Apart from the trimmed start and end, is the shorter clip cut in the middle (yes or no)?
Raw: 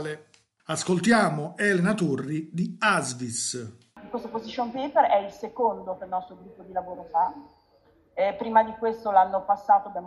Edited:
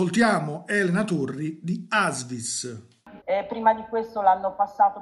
yes